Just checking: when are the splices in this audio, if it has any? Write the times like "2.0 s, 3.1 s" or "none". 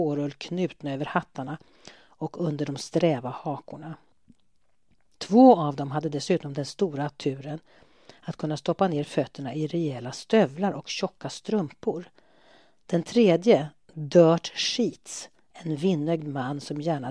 none